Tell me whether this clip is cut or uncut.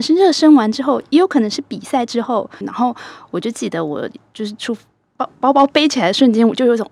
cut